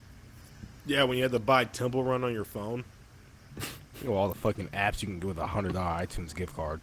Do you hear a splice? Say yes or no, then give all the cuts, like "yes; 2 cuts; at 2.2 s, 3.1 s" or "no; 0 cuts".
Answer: no; 0 cuts